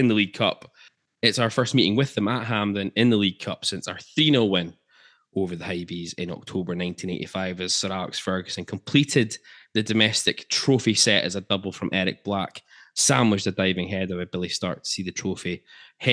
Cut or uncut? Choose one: uncut